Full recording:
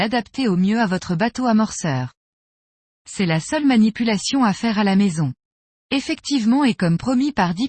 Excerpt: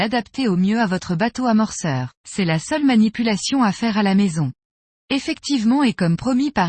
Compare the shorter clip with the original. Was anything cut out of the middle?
yes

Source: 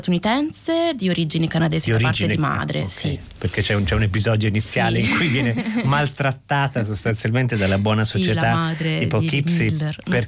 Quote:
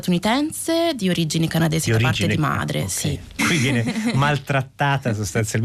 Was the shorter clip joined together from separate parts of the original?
yes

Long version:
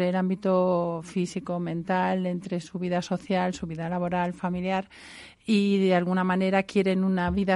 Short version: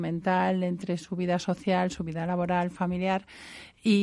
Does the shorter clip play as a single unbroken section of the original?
yes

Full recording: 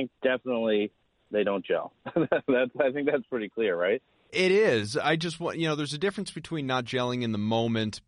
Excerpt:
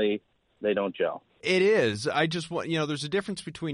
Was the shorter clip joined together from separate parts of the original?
yes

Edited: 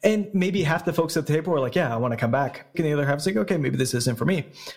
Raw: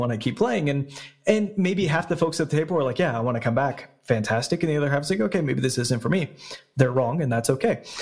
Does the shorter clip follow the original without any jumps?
no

